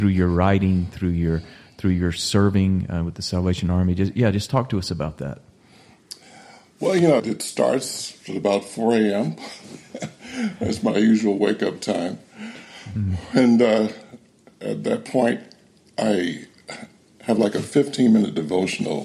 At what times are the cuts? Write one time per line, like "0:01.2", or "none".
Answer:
0:07.2